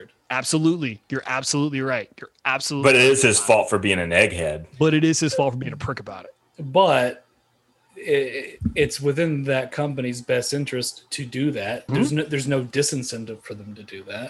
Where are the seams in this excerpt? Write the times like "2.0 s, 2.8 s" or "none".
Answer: 11.9 s